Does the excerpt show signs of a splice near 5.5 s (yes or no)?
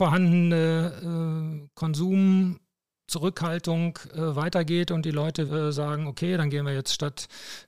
yes